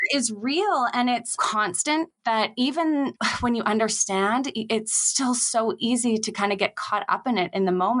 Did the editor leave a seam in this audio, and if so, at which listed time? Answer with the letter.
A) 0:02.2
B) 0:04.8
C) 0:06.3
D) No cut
A